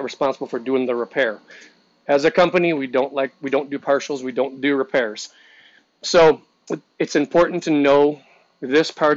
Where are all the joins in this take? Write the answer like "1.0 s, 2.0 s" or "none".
none